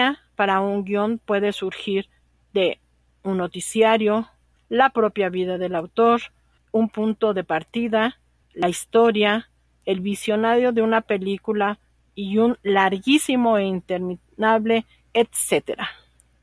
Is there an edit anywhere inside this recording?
yes; 2 cuts; at 4.6 s, 6.6 s

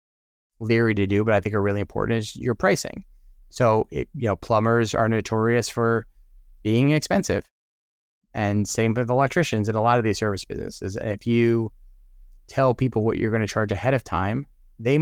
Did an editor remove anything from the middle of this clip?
no; 0 cuts

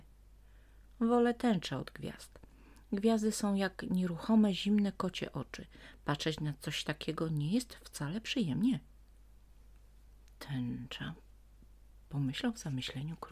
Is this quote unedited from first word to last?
yes; 0 cuts

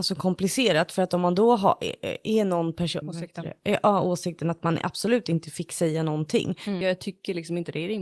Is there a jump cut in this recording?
yes; 2 cuts; at 3.0 s, 6.8 s

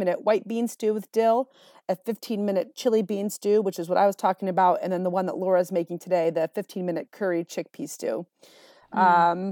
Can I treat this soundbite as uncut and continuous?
yes; 0 cuts

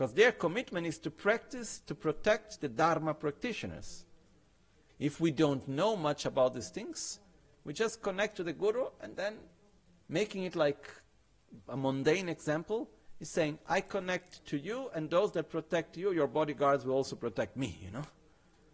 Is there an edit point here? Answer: yes; 1 cut; at 4.9 s

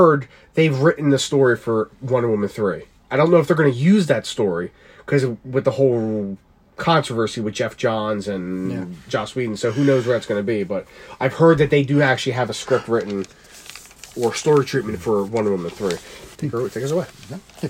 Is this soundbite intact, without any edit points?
no; 1 cut; at 16.3 s

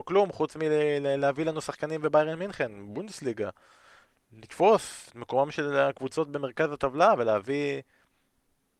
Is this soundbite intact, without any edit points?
yes; 0 cuts

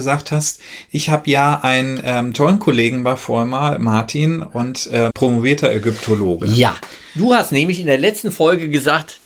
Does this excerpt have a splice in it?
yes; 1 cut; at 5.1 s

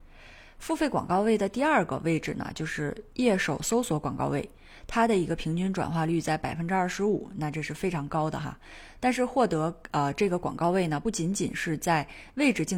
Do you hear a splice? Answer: no; 0 cuts

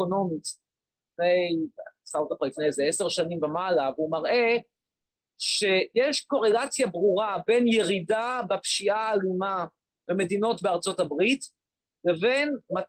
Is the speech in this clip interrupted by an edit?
no; 0 cuts

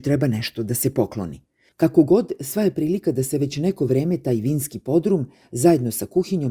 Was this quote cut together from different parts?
yes; 1 cut; at 1.7 s

